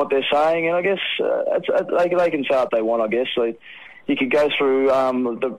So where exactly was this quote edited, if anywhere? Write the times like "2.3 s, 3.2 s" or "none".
none